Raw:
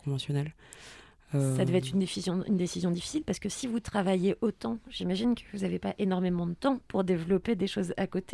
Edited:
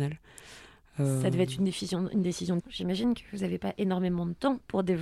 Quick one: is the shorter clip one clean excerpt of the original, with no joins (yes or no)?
no